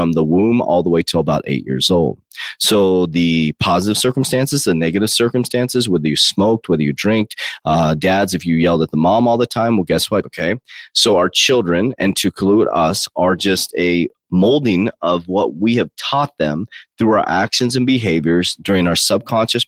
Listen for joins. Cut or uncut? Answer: cut